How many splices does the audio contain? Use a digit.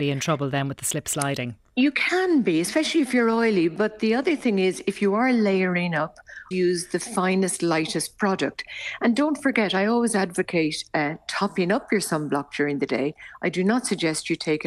1